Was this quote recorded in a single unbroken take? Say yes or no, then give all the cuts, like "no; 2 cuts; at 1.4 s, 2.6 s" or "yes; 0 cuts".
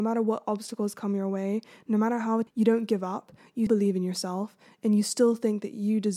no; 2 cuts; at 2.5 s, 3.7 s